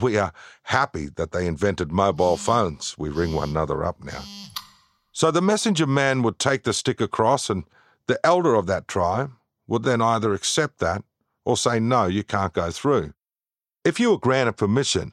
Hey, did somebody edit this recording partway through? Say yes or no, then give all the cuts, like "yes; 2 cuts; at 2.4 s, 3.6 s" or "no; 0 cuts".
no; 0 cuts